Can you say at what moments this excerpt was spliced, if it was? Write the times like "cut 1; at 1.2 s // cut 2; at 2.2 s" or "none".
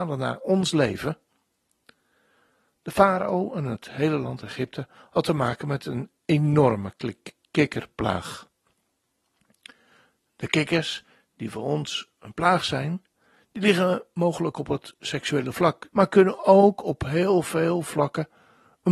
cut 1; at 15.9 s